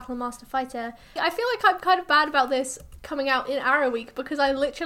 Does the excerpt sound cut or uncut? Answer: cut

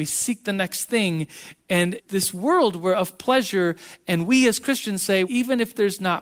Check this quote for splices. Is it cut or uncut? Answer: cut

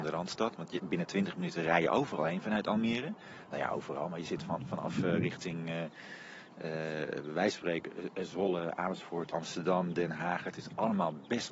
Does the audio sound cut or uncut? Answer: cut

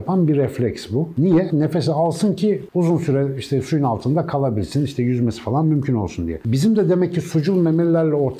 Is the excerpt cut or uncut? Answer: cut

